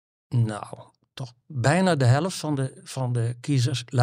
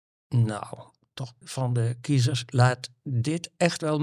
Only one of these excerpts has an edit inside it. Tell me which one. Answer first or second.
second